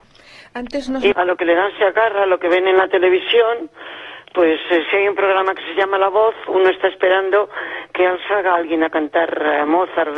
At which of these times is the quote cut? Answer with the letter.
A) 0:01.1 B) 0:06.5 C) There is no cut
A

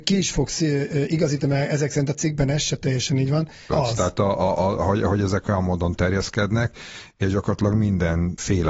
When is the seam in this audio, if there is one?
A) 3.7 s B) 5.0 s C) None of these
A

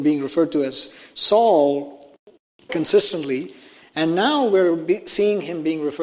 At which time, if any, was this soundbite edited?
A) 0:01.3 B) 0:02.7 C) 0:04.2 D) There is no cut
B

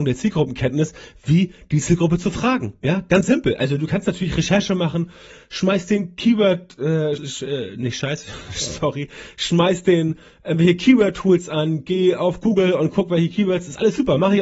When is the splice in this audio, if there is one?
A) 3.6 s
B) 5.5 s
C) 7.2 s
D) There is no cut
C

